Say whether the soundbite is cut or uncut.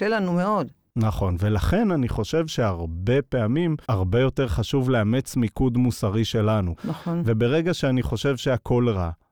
cut